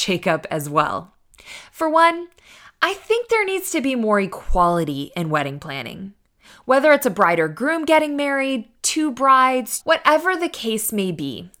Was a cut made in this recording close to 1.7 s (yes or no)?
no